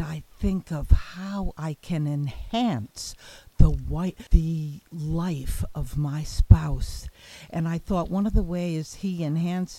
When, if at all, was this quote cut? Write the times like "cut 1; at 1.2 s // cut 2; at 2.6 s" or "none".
cut 1; at 4.3 s